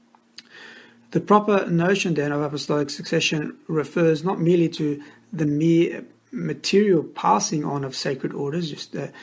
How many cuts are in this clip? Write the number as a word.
zero